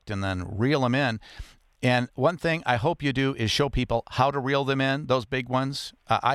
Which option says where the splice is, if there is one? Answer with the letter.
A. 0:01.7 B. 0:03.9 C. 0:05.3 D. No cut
D